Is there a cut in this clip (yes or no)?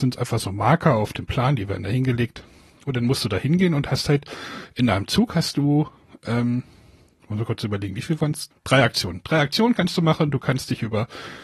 yes